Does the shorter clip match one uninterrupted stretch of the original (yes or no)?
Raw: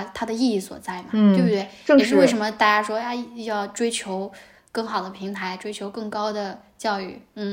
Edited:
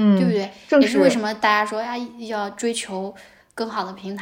yes